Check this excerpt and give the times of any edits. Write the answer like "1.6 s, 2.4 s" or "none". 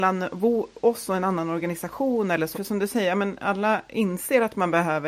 2.5 s